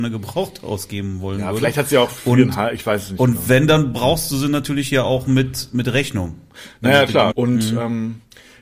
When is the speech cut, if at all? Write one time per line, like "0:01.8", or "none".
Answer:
0:07.3